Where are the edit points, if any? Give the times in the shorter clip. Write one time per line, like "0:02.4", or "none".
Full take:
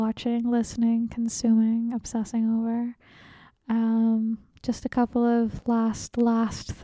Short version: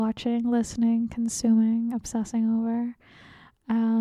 none